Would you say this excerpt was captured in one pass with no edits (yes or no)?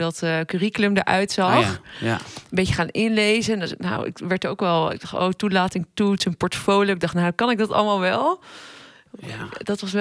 yes